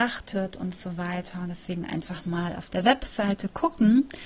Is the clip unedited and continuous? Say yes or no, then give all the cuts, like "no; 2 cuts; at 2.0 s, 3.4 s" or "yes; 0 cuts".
yes; 0 cuts